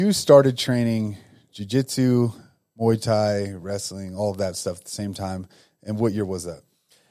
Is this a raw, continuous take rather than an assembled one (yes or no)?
yes